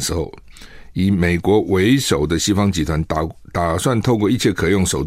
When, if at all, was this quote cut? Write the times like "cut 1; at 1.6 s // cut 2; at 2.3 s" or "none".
none